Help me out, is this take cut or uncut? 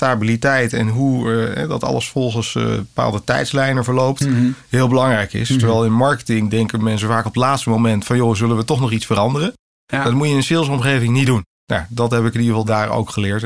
uncut